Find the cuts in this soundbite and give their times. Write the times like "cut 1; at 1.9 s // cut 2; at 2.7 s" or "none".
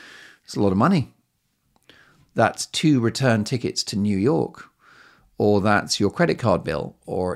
none